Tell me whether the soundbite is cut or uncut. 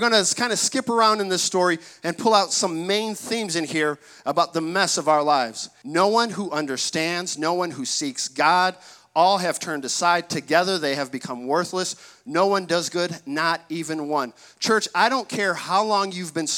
cut